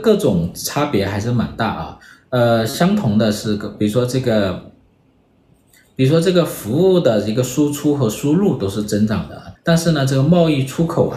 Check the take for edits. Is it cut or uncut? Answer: cut